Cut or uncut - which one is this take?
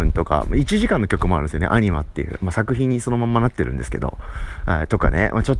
uncut